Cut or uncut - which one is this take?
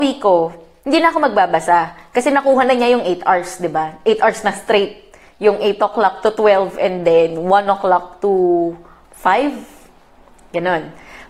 uncut